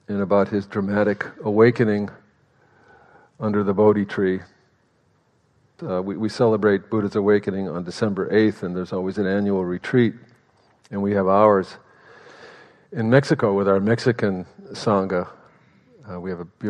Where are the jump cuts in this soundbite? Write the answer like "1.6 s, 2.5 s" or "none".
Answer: 5.8 s